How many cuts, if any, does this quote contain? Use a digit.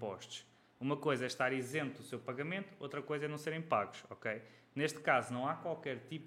0